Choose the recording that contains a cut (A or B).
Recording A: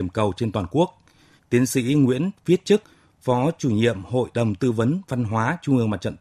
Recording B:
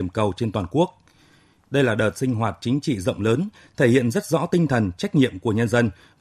A